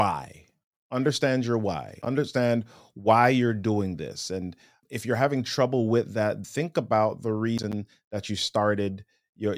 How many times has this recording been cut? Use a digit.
1